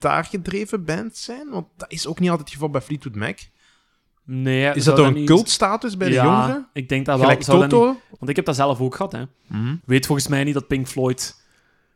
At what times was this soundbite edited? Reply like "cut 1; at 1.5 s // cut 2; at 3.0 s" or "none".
cut 1; at 8.2 s // cut 2; at 9.8 s